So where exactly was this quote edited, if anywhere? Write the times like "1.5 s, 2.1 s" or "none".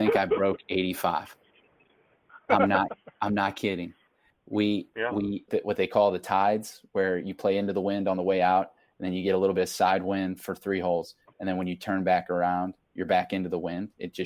5.5 s